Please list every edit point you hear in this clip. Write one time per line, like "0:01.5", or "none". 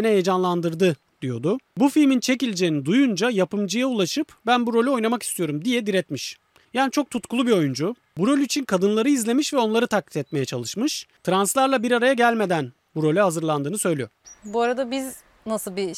none